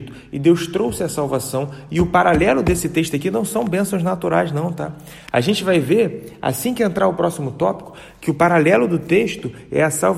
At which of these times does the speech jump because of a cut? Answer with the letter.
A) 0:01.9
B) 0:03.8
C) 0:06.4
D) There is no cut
D